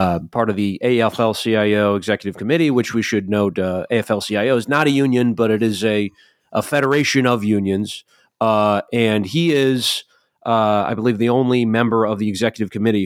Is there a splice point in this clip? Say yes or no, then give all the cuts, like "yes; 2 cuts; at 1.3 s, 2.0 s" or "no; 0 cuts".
no; 0 cuts